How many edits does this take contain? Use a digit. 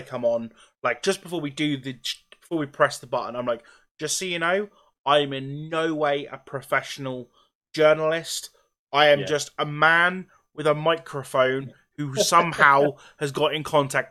0